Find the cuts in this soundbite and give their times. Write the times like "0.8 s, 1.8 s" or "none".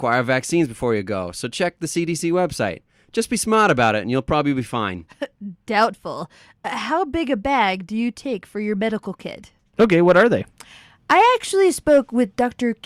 9.7 s